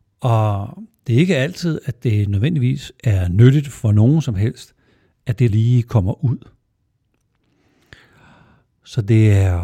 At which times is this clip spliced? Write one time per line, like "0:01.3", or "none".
0:05.5